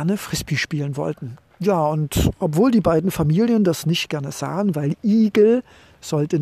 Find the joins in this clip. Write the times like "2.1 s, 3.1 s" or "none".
none